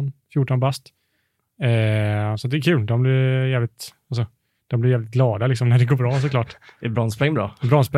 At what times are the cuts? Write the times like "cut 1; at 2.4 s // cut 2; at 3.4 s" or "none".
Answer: none